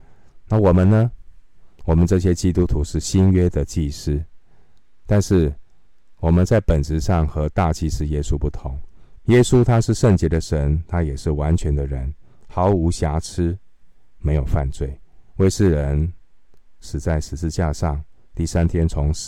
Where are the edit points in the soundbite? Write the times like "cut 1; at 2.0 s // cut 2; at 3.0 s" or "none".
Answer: cut 1; at 9.2 s // cut 2; at 15.3 s